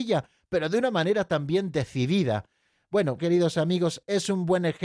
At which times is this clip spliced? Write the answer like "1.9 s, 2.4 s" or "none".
3.2 s